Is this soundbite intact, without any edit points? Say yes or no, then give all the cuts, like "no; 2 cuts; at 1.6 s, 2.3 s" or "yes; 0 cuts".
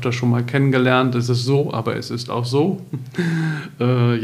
yes; 0 cuts